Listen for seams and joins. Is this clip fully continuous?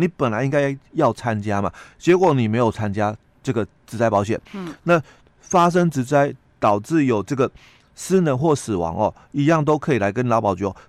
yes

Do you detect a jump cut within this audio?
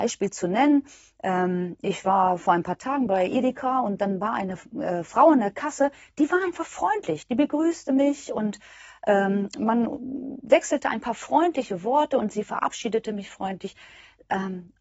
no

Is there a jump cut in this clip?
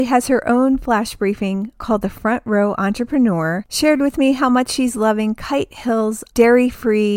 yes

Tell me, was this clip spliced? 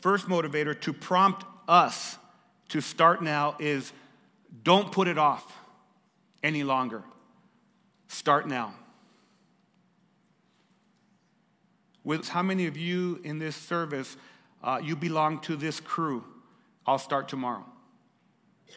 yes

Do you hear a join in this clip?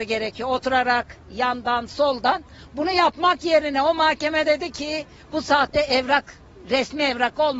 yes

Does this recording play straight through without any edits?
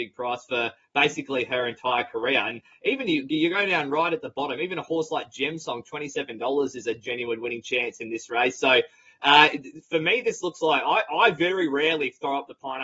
yes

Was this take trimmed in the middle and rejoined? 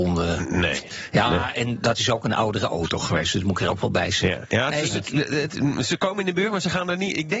no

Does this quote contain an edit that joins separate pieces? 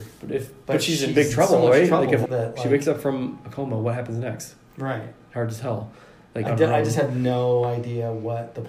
yes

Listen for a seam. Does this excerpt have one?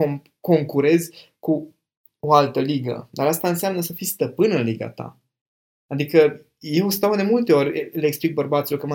no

